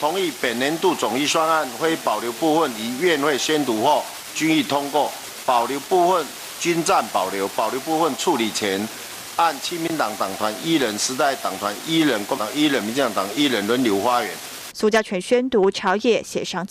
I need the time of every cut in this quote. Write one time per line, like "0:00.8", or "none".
0:12.4
0:14.7